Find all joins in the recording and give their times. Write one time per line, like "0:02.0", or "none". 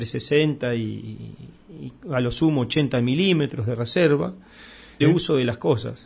0:05.0